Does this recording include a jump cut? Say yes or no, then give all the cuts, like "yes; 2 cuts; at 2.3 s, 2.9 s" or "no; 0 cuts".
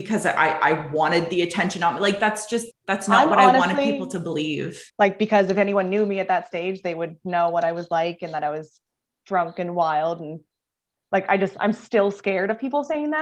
yes; 2 cuts; at 2.7 s, 4.9 s